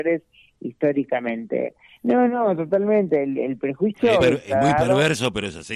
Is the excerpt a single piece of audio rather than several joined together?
no; 2 cuts; at 1.9 s, 4.2 s

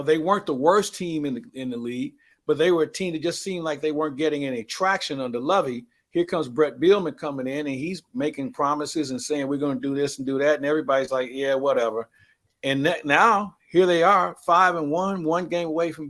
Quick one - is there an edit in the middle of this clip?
no; 0 cuts

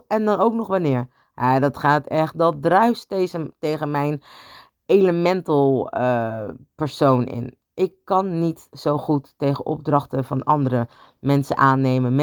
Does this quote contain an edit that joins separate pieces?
no; 0 cuts

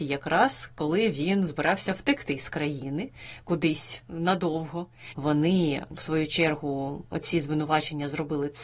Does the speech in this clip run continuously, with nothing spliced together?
no; 1 cut; at 5.1 s

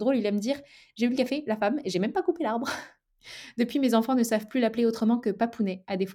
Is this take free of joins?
yes; 0 cuts

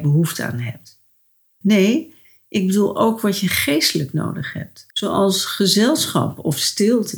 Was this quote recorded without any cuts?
no; 2 cuts; at 1.6 s, 4.9 s

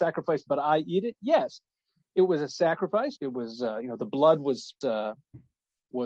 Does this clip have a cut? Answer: yes; 2 cuts; at 3.2 s, 4.8 s

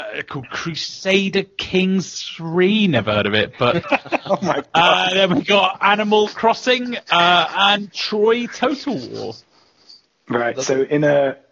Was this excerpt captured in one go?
no; 1 cut; at 3.8 s

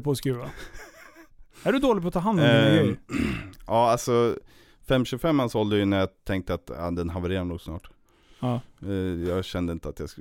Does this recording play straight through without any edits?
yes; 0 cuts

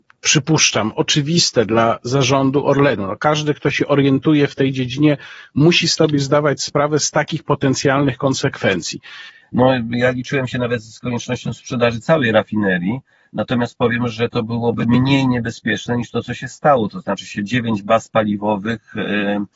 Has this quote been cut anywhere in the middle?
yes; 1 cut; at 9.4 s

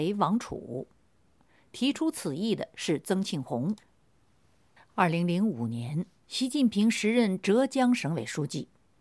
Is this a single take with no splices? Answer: no; 1 cut; at 4.8 s

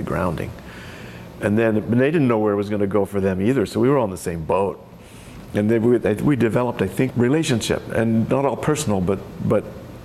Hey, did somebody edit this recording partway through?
yes; 1 cut; at 7.1 s

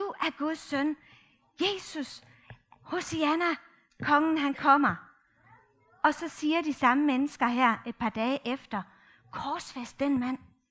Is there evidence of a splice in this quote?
no; 0 cuts

